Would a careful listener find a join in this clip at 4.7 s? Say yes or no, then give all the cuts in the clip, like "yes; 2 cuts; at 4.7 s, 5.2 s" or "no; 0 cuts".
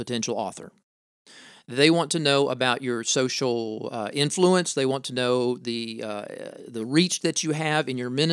no; 0 cuts